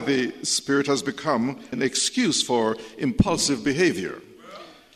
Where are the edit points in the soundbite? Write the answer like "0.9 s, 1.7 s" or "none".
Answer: 1.7 s